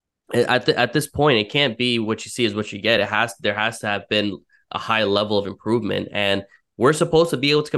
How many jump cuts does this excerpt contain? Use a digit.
0